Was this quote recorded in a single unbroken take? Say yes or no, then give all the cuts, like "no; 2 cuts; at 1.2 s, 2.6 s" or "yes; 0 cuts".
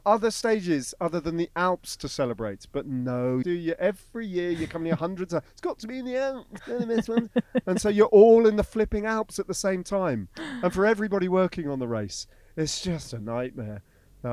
no; 2 cuts; at 3.4 s, 6.6 s